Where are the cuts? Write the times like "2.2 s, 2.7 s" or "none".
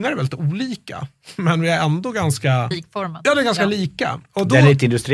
2.7 s